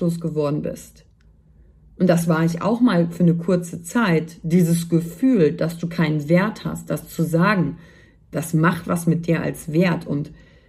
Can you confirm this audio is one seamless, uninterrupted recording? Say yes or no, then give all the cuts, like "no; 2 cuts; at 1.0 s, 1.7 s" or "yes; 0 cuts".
no; 1 cut; at 8.3 s